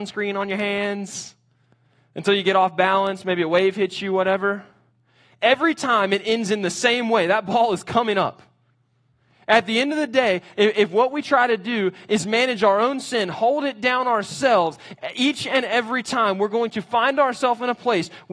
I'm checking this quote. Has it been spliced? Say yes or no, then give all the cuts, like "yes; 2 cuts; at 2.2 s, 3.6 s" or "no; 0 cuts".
no; 0 cuts